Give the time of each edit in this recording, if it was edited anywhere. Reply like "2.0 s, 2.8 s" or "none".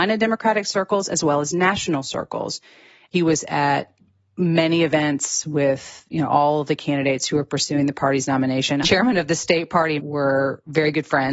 8.8 s, 10.0 s